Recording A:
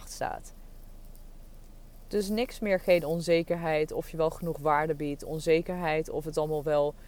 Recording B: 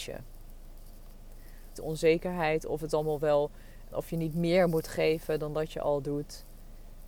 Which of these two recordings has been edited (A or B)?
B